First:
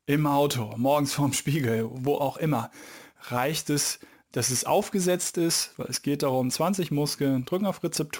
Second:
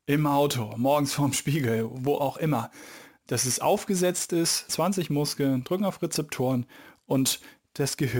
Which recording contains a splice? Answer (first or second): second